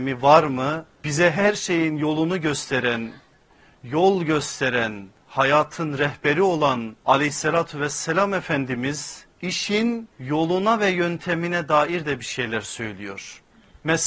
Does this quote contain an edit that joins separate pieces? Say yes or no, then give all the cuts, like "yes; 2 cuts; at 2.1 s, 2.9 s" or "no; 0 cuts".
yes; 3 cuts; at 1.0 s, 7.0 s, 10.1 s